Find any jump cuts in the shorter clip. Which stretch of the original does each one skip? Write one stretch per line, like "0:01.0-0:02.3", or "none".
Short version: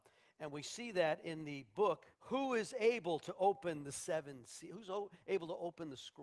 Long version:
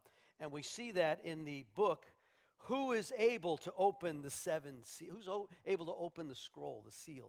0:02.1-0:02.5